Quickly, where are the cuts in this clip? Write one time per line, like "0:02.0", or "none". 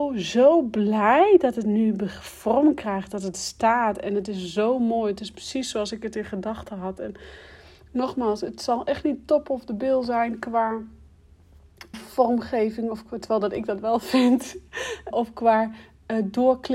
0:11.9
0:15.1